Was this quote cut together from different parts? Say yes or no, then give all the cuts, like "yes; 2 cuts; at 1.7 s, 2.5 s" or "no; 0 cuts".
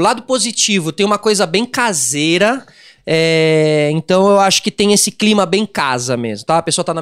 yes; 1 cut; at 3.0 s